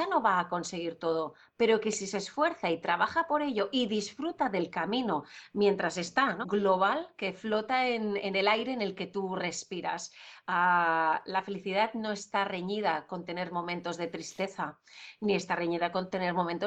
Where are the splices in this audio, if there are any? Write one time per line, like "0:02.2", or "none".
0:06.4
0:08.2